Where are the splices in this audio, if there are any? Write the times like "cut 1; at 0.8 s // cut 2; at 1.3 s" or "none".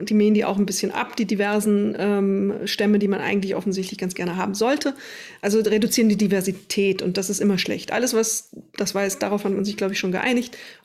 none

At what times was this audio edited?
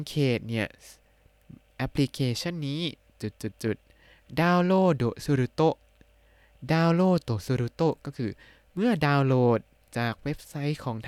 none

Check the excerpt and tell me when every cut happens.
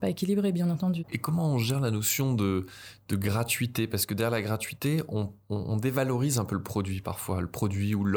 none

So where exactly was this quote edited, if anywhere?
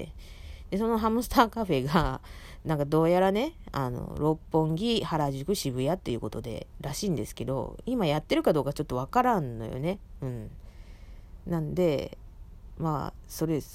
none

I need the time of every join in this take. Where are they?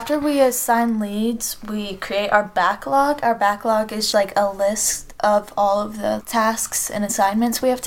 cut 1; at 4.1 s

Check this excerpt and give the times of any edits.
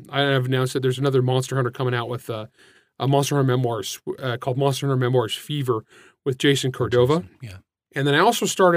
cut 1; at 7.9 s

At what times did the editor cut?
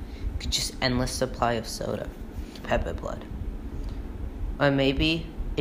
cut 1; at 2.6 s

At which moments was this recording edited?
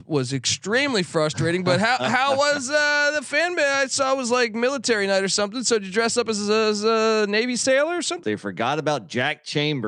cut 1; at 8.2 s

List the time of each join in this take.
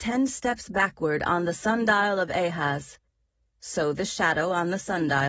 none

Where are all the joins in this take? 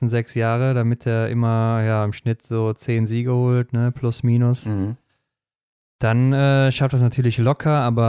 none

